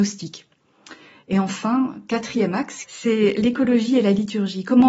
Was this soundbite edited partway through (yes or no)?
yes